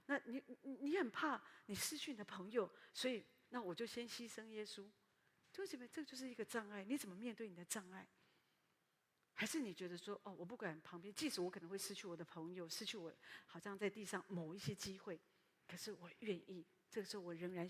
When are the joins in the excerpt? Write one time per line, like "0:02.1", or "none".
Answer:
0:02.9